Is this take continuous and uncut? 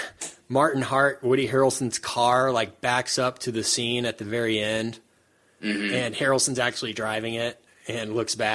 yes; 0 cuts

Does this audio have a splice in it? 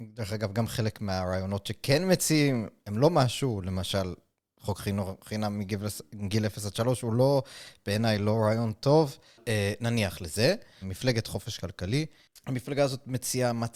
yes; 1 cut; at 10.8 s

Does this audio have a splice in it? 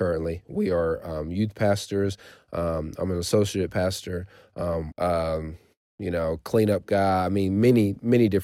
yes; 1 cut; at 4.9 s

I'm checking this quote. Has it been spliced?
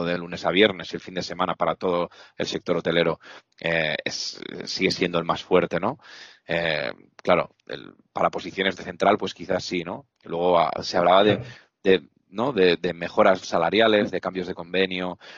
yes; 1 cut; at 13.4 s

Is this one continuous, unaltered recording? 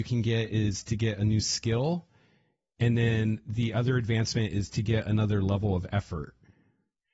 yes; 0 cuts

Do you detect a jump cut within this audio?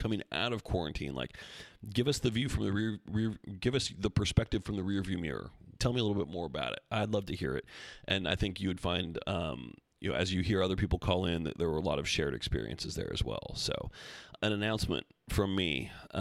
yes; 2 cuts; at 5.8 s, 14.4 s

